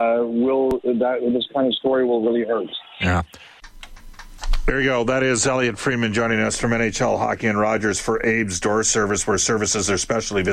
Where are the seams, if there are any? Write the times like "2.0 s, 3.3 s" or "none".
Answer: none